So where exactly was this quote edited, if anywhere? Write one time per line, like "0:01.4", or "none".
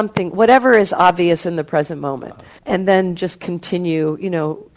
0:02.6